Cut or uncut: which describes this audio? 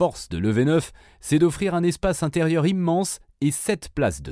uncut